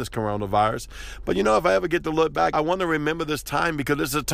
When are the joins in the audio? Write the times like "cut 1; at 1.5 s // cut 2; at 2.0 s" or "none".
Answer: cut 1; at 2.5 s